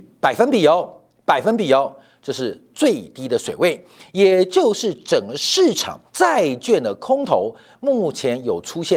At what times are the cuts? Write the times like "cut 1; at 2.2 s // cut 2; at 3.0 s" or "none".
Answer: cut 1; at 6.1 s

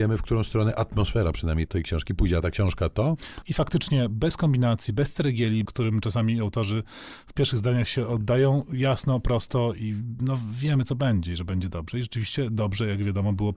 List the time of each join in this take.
cut 1; at 1.7 s // cut 2; at 3.4 s // cut 3; at 5.7 s

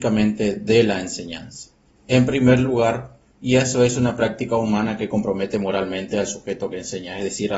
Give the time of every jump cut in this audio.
cut 1; at 2.0 s // cut 2; at 3.3 s

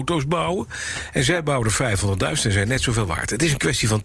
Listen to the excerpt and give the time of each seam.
none

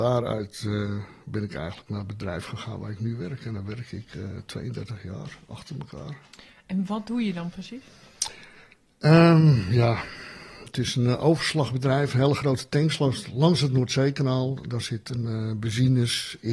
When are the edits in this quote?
none

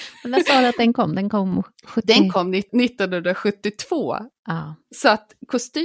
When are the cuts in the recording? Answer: none

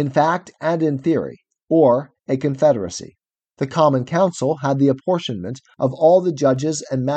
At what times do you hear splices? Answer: cut 1; at 1.6 s // cut 2; at 3.5 s

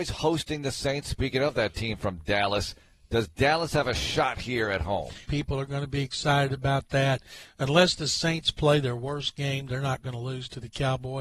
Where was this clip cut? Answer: cut 1; at 5.2 s

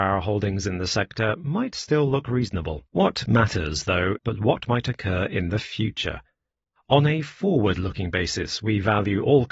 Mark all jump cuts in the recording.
cut 1; at 2.9 s // cut 2; at 4.2 s

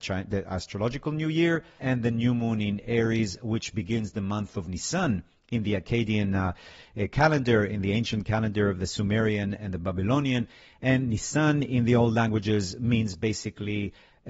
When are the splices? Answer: cut 1; at 1.8 s

